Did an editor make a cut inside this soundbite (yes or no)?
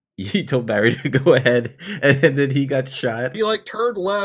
yes